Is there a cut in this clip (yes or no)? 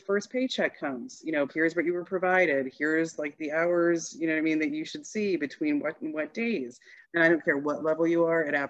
yes